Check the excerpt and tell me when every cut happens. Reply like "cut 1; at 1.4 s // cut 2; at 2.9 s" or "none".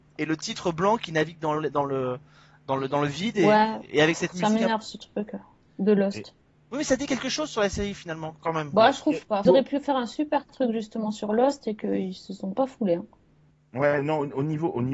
cut 1; at 9.5 s